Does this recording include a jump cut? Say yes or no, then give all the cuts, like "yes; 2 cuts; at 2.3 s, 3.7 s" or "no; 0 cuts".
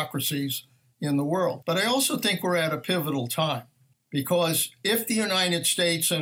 yes; 2 cuts; at 1.6 s, 3.9 s